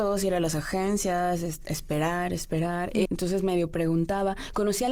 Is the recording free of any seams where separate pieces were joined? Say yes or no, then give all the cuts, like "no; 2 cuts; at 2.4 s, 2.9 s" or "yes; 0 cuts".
no; 1 cut; at 3.1 s